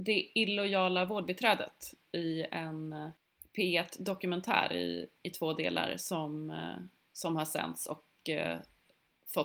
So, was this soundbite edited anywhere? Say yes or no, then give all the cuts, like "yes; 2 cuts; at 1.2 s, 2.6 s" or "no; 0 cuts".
no; 0 cuts